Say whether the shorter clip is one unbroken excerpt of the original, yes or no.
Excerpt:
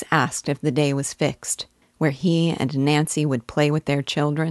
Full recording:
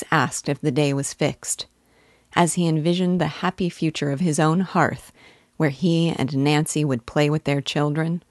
no